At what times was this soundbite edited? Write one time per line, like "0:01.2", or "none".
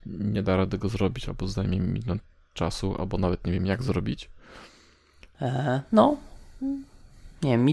0:05.3